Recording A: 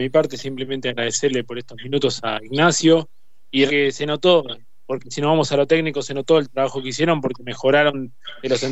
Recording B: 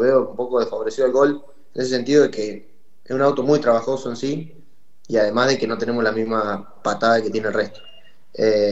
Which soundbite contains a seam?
A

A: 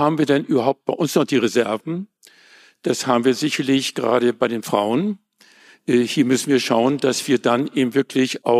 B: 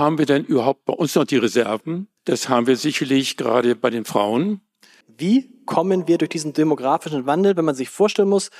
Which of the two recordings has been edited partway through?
B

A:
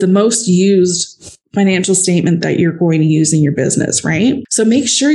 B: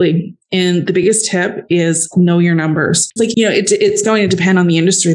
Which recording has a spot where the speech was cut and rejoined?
B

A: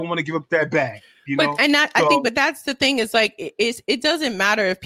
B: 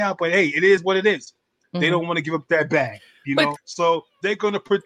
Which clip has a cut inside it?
B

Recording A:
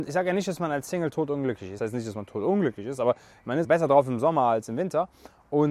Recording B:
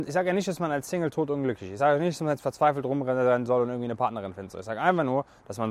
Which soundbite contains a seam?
A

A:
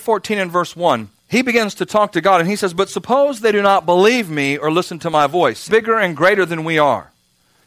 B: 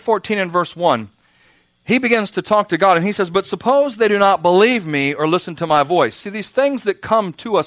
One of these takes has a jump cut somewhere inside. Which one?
A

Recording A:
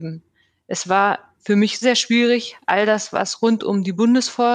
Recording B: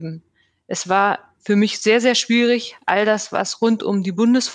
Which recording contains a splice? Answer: A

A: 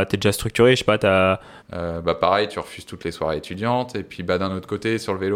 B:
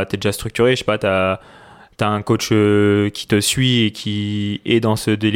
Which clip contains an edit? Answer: A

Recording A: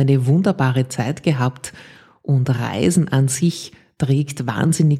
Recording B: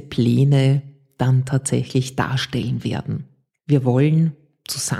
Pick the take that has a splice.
B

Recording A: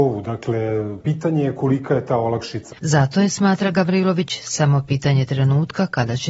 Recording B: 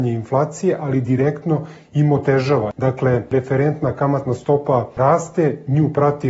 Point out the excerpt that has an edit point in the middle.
A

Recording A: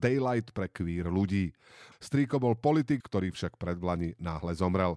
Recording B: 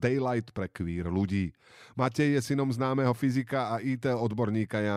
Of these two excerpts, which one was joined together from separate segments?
A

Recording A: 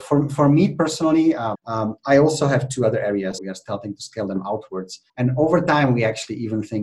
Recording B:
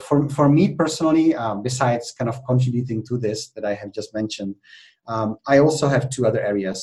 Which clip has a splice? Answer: A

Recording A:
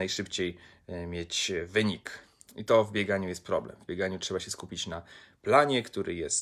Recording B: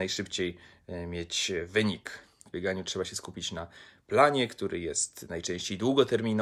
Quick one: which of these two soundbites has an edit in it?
B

